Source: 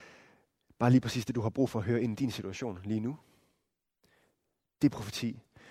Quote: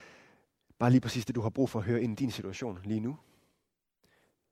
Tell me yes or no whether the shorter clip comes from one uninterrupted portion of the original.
yes